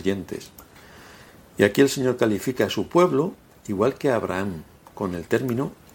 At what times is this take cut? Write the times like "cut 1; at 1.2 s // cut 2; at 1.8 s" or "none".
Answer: none